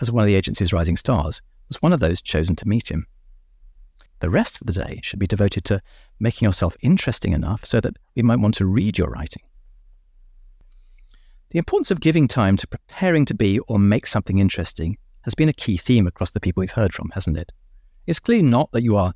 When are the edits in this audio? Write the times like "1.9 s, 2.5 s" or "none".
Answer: 4.1 s